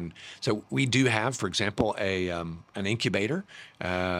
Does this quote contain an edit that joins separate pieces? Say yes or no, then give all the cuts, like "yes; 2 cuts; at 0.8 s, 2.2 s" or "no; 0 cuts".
no; 0 cuts